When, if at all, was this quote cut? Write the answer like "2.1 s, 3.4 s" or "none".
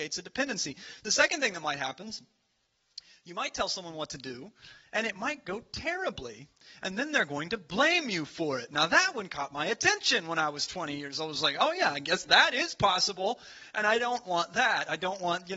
none